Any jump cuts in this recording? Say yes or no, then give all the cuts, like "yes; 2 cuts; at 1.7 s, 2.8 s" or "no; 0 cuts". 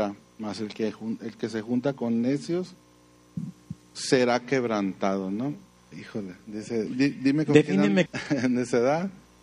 yes; 2 cuts; at 6.9 s, 8.1 s